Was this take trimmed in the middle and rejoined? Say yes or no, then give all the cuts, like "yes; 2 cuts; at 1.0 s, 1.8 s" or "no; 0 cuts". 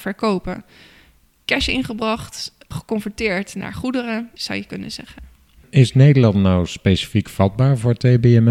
yes; 1 cut; at 4.4 s